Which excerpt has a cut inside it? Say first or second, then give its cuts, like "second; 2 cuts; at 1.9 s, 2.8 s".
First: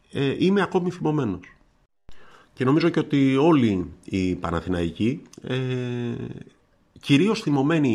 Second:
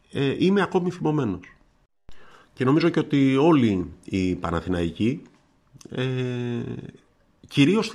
first; 1 cut; at 5.3 s